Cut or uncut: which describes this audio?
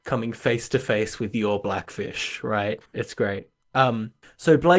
cut